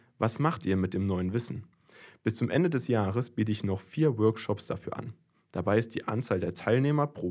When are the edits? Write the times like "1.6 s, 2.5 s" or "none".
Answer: none